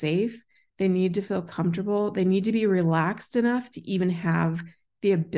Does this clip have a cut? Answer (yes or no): no